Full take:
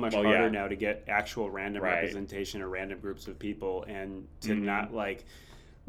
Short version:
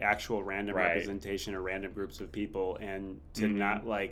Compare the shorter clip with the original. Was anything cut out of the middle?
no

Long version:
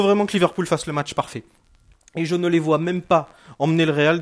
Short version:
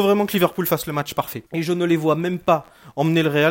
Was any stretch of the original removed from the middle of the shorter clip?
yes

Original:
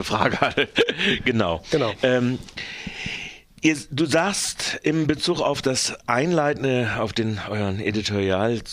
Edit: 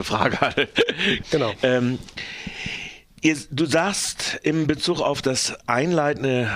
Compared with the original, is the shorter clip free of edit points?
no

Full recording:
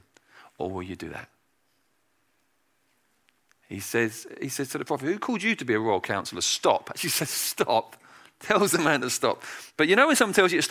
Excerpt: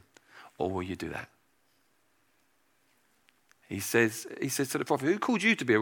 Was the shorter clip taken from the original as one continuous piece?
yes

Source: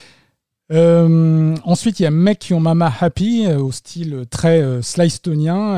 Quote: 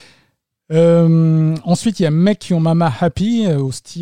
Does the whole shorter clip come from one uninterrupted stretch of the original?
yes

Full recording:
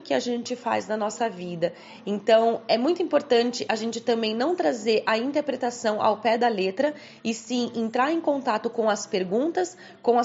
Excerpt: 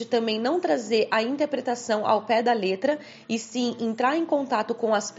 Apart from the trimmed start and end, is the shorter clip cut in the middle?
no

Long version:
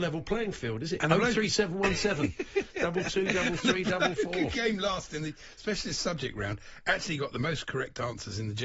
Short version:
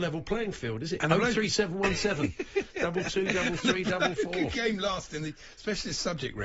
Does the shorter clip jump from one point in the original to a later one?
no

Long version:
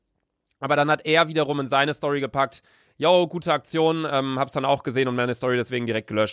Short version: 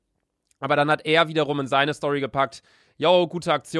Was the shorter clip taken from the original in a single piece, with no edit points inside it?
yes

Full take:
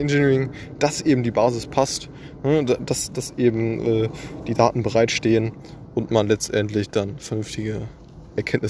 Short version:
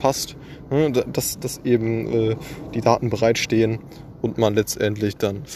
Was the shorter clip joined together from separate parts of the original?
no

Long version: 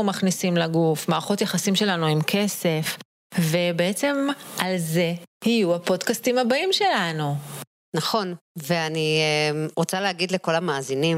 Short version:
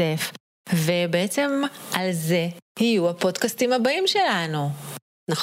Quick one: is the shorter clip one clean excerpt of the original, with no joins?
yes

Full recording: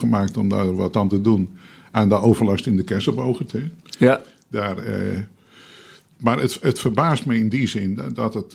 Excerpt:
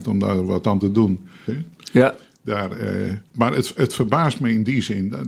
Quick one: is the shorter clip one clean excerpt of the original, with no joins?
no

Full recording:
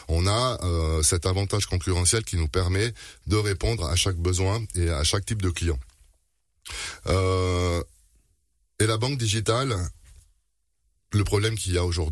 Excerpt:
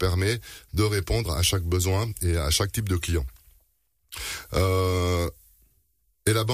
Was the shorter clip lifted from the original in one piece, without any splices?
yes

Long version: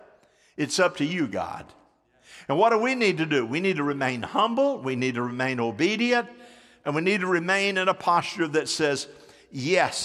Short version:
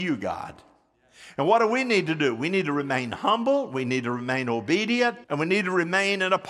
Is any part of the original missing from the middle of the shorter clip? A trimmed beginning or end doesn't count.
yes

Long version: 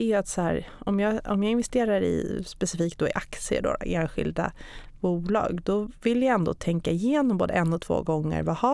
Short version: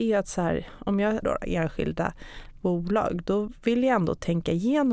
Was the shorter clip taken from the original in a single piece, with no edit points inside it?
no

